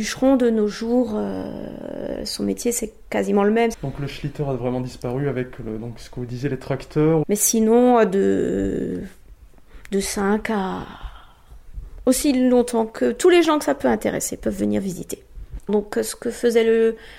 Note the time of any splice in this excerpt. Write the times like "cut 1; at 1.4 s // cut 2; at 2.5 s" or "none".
cut 1; at 3.7 s // cut 2; at 7.2 s // cut 3; at 15.7 s